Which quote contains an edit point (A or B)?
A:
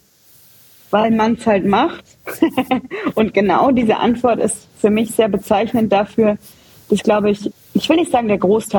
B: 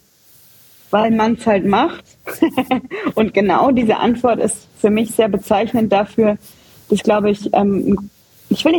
A